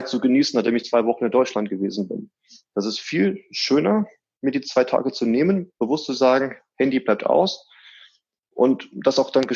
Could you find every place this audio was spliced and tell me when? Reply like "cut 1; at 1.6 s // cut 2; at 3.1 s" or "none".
none